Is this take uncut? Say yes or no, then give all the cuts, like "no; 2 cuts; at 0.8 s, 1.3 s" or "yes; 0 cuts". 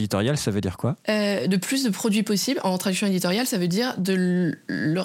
no; 1 cut; at 1.0 s